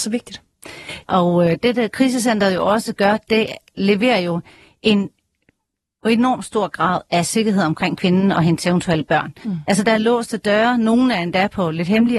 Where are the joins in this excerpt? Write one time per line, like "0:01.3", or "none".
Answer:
0:01.0